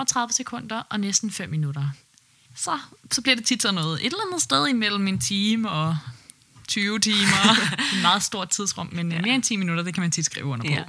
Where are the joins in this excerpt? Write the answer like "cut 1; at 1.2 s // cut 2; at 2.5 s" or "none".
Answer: cut 1; at 2.4 s